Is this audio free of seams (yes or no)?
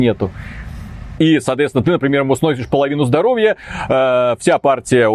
no